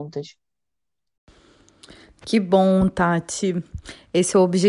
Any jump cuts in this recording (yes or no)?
no